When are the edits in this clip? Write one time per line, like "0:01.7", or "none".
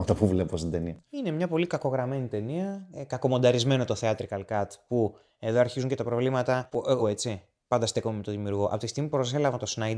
0:07.0